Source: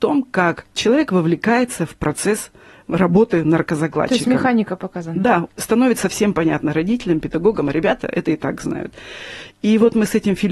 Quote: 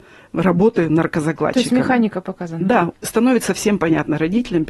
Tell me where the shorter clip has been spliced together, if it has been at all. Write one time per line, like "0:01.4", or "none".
none

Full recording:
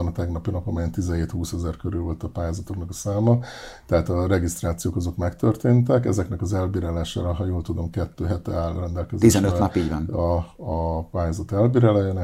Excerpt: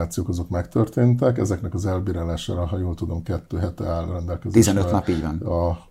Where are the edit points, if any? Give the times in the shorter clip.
none

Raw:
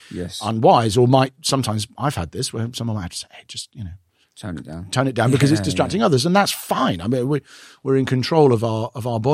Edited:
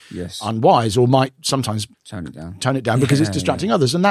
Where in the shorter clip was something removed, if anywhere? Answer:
0:01.9

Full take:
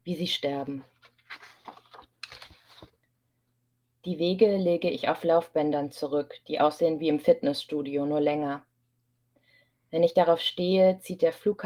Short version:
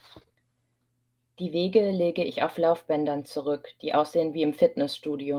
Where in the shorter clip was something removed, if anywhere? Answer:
none

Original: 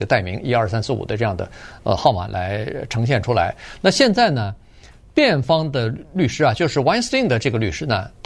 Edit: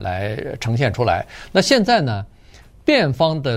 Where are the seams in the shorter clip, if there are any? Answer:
none

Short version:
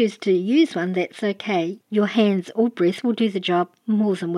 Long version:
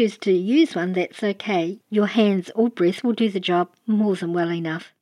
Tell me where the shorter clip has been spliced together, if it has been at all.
none

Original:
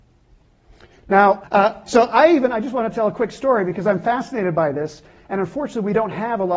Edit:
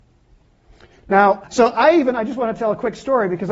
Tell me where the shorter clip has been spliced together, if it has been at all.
0:01.5

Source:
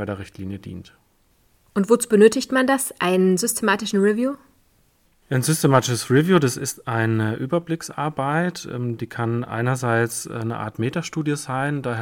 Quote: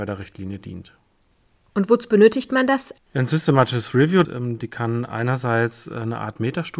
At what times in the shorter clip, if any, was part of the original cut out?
0:03.0
0:04.3

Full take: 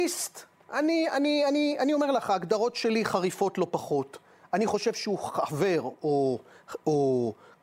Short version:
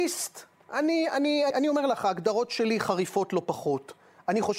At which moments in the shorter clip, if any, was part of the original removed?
0:01.5

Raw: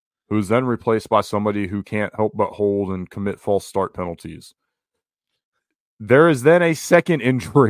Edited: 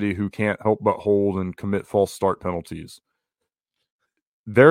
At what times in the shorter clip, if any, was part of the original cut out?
none

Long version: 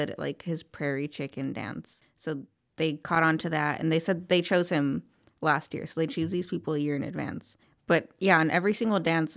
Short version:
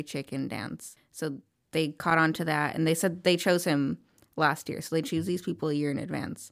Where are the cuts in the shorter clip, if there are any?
none

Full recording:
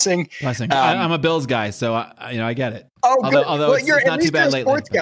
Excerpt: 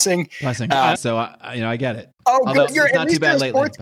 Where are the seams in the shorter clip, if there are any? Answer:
0:01.0
0:02.7

